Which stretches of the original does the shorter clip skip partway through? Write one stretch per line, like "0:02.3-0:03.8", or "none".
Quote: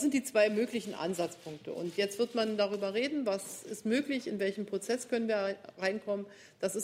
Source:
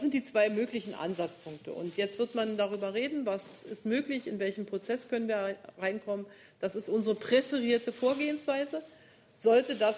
none